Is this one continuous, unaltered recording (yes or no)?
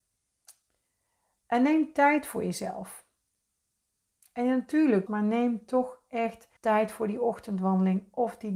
no